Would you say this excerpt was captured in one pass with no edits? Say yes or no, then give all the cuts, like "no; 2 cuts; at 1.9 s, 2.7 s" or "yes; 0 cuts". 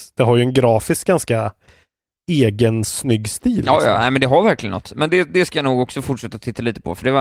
yes; 0 cuts